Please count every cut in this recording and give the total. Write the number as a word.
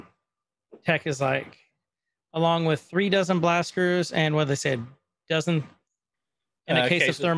zero